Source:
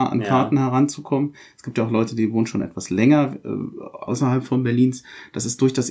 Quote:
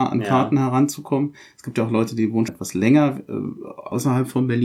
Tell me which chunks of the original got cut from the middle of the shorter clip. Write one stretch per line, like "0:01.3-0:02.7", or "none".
0:02.5-0:02.6

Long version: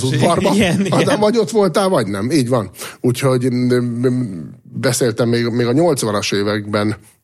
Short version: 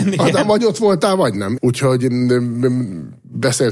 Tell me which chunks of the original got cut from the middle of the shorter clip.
0:02.3-0:03.0

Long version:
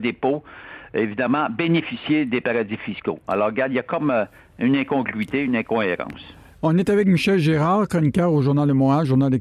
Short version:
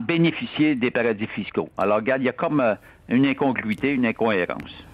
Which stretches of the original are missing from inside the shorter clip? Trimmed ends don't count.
none

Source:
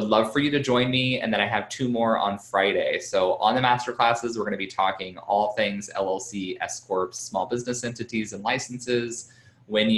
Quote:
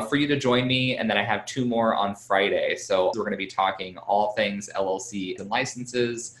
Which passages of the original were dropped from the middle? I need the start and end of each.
0:03.4-0:04.3
0:06.6-0:08.3

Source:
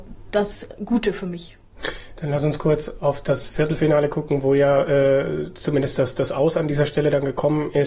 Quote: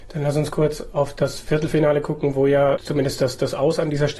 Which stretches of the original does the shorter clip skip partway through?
0:04.8-0:05.5

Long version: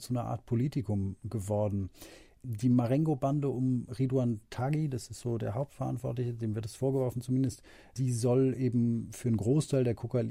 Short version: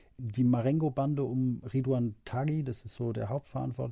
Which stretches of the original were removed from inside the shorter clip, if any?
none

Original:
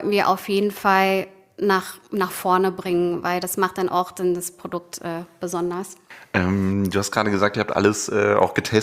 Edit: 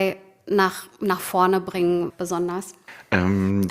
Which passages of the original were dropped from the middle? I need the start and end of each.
0:03.2-0:05.3

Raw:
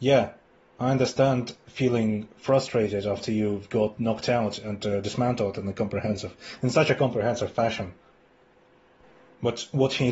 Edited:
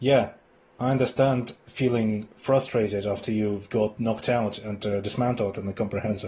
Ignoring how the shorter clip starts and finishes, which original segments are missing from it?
none

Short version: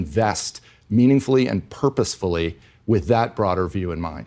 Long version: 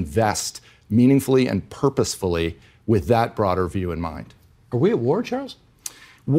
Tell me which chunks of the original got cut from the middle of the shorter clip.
none

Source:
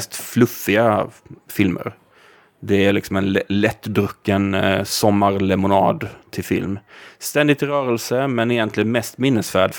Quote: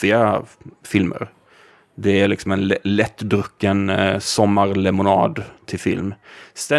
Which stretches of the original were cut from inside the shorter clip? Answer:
none

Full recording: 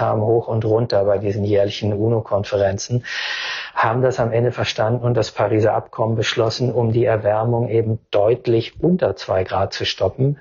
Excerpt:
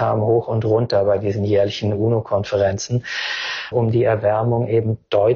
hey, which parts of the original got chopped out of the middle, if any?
0:03.7-0:06.7

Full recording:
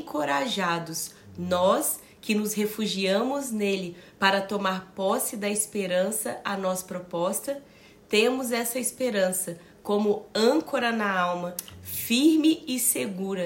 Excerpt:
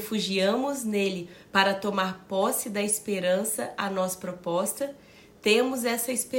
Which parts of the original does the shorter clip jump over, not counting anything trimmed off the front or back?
none

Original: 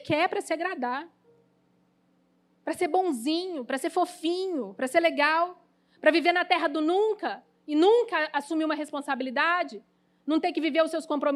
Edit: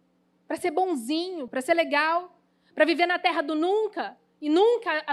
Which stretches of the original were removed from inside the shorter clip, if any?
0:03.6-0:04.7

